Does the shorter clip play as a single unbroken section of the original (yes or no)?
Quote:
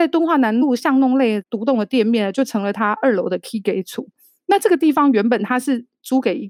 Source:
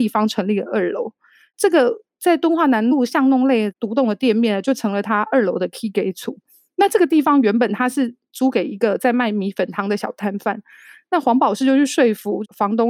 yes